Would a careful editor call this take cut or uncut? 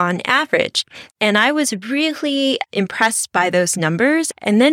cut